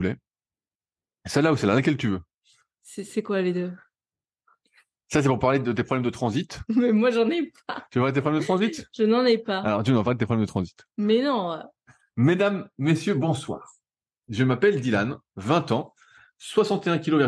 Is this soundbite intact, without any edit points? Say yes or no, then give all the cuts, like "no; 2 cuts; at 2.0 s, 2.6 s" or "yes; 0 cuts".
yes; 0 cuts